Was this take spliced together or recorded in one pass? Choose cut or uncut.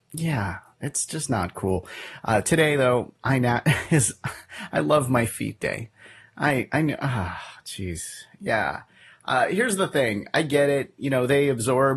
uncut